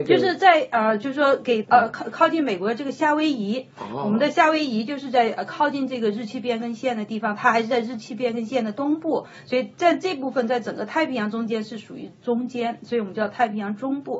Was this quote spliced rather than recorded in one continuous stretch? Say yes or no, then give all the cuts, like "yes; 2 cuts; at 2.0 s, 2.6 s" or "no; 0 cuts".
yes; 1 cut; at 1.6 s